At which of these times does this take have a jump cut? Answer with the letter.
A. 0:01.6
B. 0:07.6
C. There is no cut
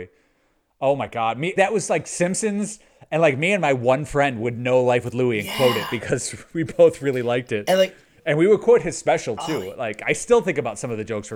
A